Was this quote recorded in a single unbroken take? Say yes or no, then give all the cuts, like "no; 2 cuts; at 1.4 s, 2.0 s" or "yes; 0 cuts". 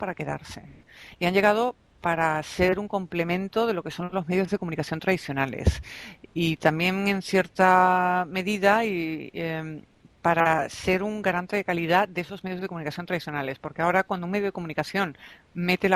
yes; 0 cuts